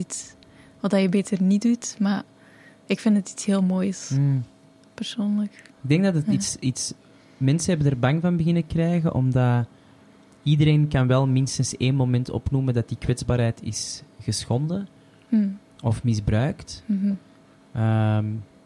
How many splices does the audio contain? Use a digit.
1